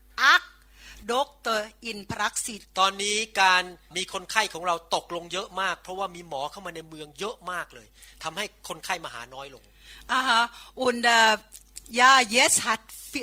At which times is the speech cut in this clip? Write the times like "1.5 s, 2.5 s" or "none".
2.6 s